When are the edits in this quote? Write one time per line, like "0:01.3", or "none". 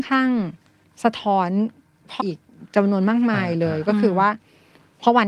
0:02.2